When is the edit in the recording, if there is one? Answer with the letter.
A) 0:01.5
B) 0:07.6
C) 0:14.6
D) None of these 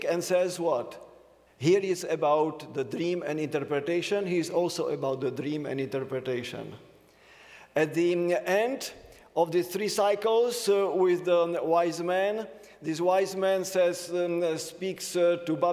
A